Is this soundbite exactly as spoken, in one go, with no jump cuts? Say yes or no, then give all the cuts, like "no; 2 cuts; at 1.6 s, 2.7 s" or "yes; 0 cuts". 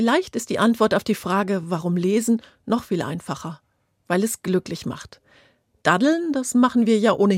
yes; 0 cuts